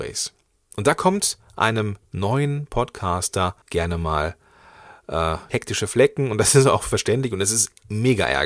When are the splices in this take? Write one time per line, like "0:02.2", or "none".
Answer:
0:02.0
0:03.6
0:05.5